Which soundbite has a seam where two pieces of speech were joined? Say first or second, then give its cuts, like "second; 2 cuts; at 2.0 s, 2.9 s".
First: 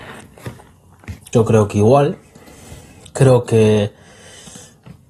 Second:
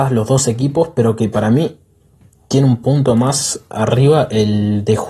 first; 1 cut; at 1.3 s